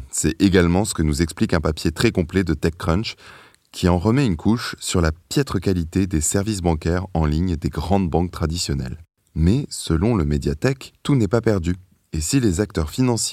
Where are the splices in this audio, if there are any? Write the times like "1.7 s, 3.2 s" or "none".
none